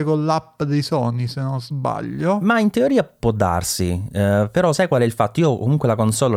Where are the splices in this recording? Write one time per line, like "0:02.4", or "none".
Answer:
none